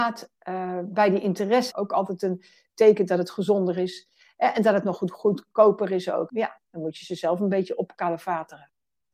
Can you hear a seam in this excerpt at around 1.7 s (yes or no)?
yes